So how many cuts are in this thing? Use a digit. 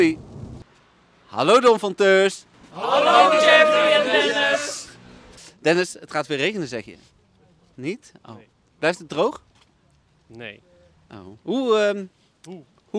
1